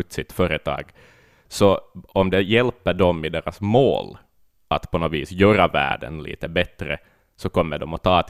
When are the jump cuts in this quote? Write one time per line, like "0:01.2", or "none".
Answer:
none